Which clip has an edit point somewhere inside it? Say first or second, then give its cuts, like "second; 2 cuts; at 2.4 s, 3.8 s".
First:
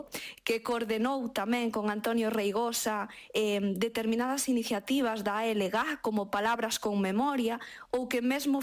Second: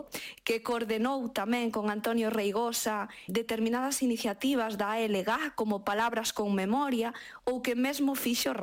second; 1 cut; at 3.3 s